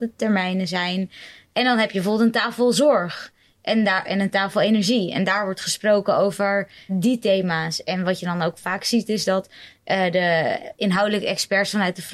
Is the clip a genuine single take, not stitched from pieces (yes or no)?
no